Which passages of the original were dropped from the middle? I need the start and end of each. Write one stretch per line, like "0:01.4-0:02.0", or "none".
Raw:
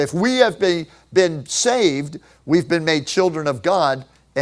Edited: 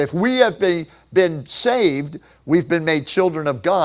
none